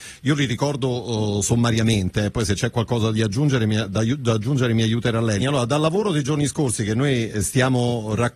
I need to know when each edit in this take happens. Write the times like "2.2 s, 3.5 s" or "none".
5.4 s